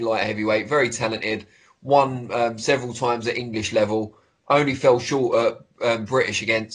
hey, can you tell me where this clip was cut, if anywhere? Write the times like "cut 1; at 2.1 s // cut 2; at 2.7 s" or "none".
none